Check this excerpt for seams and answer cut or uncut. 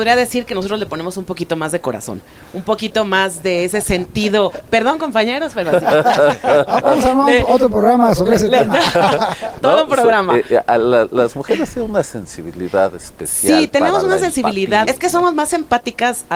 cut